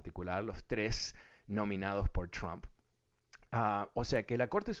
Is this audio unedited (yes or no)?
yes